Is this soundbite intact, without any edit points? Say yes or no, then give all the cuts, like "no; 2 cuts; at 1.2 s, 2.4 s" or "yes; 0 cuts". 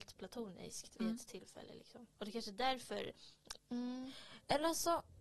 no; 3 cuts; at 1.0 s, 2.1 s, 3.6 s